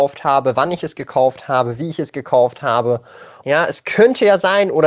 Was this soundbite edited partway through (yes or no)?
yes